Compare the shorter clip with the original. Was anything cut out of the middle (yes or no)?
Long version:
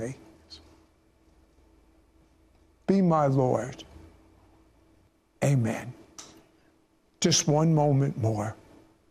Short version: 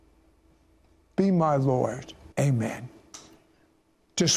yes